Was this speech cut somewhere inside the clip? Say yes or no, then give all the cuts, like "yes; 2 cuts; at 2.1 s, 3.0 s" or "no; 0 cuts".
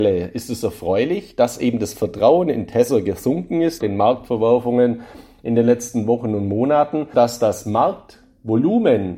yes; 2 cuts; at 3.8 s, 7.1 s